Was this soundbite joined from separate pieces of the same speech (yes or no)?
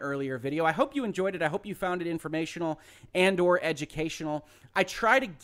no